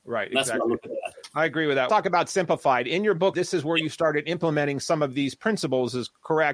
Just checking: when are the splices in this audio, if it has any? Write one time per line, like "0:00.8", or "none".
0:01.9
0:03.3